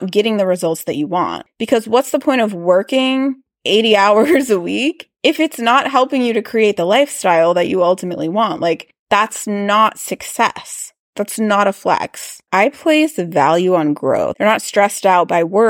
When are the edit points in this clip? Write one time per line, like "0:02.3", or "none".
0:12.5
0:14.3

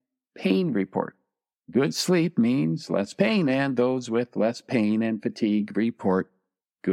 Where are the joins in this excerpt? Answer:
none

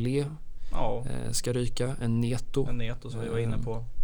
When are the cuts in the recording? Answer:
none

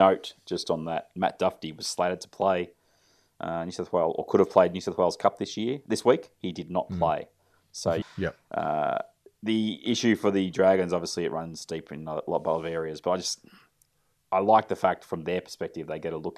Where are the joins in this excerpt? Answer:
0:08.0

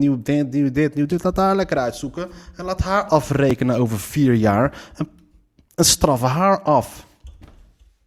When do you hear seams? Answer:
none

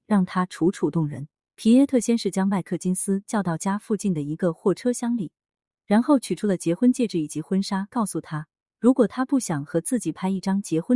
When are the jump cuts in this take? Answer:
0:04.7

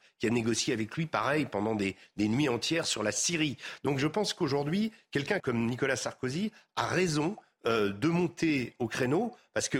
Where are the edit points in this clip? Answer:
0:05.4

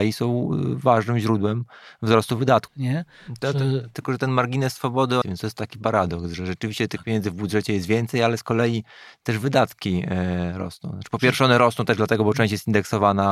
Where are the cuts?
0:02.7
0:05.2

